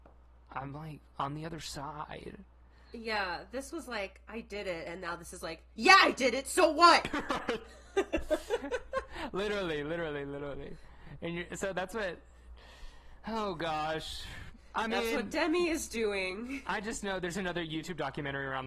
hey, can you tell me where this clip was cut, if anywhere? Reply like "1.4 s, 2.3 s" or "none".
none